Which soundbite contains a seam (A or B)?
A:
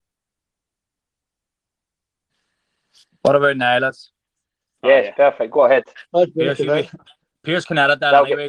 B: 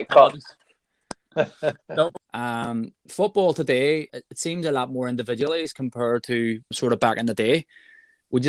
B